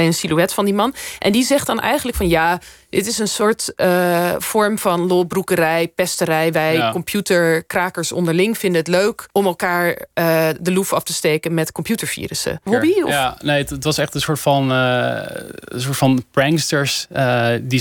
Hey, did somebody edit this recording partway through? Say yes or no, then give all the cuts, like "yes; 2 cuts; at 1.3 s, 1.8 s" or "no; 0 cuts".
yes; 2 cuts; at 9.3 s, 12.7 s